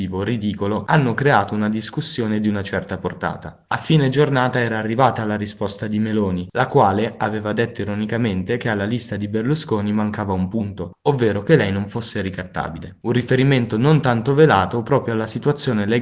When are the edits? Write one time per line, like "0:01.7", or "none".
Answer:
none